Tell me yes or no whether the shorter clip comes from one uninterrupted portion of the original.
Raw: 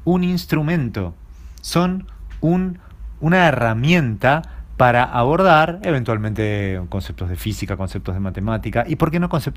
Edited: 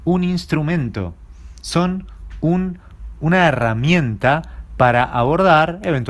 yes